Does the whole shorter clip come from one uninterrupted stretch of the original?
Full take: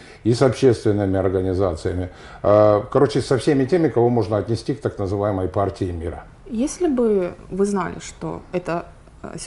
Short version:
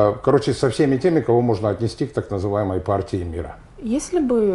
yes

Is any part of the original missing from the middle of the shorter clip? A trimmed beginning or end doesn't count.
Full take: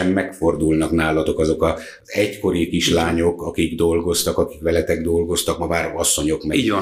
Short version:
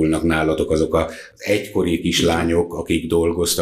no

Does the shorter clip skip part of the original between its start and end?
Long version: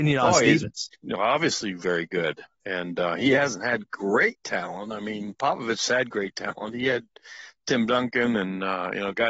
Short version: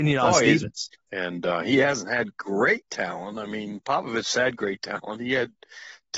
yes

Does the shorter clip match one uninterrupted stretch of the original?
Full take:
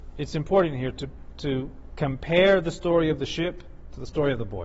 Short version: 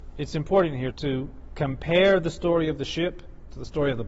no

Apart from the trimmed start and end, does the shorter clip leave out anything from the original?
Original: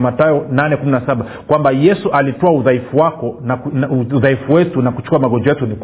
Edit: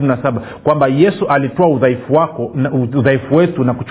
yes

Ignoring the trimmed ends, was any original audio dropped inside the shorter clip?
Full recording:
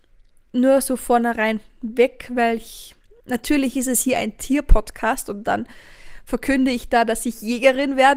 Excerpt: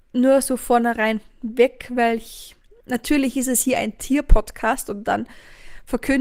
no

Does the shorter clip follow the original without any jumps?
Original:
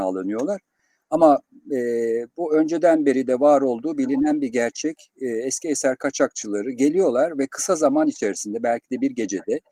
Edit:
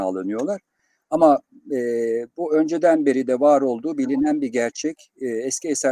yes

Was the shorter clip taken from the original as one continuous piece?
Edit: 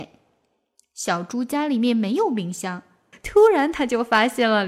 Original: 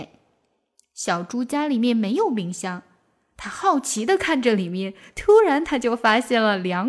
no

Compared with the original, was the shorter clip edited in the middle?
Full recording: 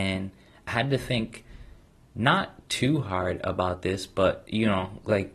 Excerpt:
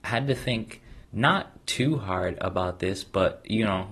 yes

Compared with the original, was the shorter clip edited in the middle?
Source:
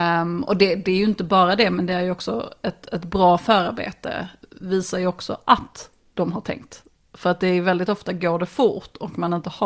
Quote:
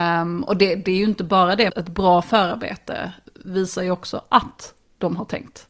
yes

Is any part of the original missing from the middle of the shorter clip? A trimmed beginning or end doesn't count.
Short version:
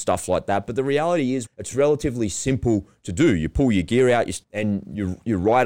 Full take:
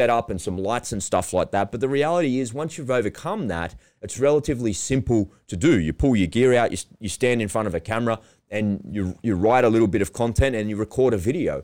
yes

